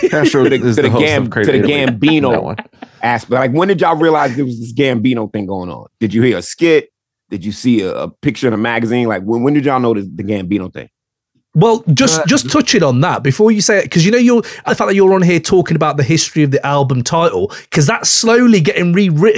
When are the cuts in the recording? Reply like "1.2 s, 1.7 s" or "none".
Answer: 14.7 s